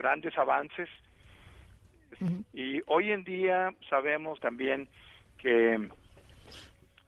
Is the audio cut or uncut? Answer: cut